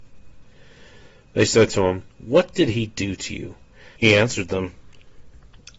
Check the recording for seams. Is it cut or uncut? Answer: cut